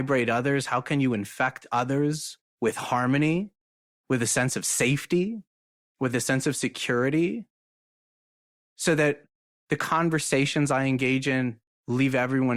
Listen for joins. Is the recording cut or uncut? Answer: cut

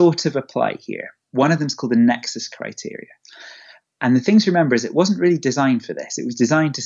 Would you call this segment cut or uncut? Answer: uncut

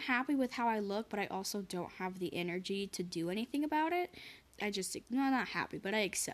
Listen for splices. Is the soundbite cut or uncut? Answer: cut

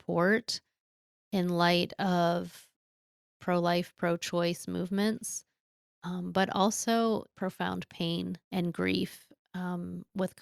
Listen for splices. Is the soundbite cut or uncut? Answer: cut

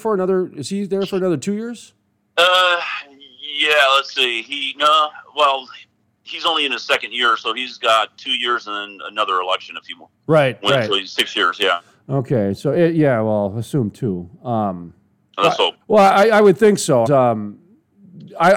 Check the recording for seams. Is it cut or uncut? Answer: cut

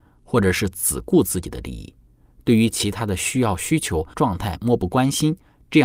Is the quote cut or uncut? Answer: cut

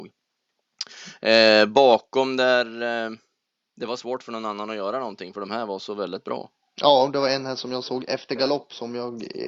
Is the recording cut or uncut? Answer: uncut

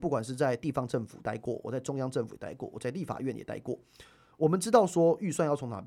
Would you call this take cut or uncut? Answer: uncut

